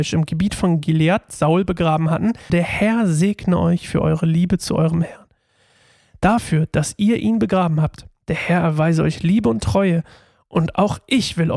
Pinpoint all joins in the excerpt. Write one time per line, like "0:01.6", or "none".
0:02.5

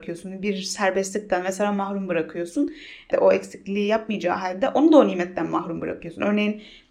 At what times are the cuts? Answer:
0:03.1

